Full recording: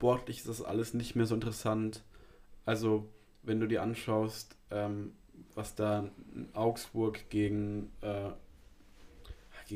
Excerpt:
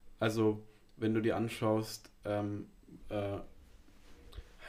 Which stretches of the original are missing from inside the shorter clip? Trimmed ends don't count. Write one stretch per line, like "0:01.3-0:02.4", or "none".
0:05.5-0:07.9